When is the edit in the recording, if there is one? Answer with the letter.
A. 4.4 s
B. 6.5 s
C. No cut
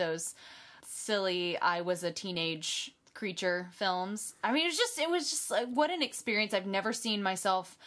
C